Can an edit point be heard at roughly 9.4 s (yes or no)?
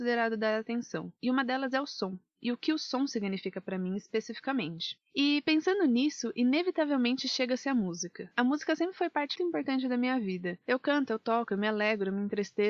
yes